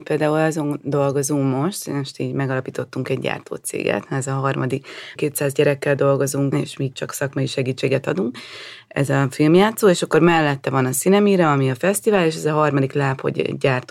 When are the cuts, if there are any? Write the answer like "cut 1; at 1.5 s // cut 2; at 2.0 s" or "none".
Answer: cut 1; at 5.2 s // cut 2; at 6.5 s